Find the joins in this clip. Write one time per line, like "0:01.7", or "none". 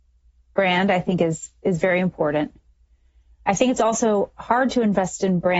none

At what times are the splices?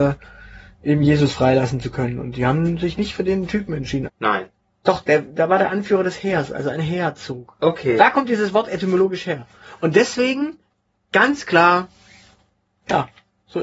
0:04.0

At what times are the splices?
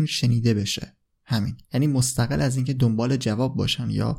0:01.6

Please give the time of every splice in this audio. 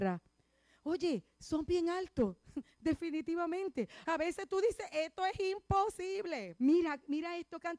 0:04.0
0:06.6

